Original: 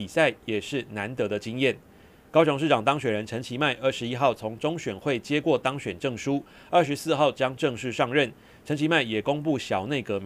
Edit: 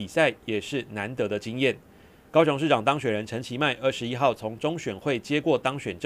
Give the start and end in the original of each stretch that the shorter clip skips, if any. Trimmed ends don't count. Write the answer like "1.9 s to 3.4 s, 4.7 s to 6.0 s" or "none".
none